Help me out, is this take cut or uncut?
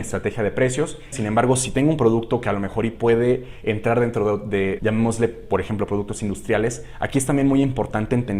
cut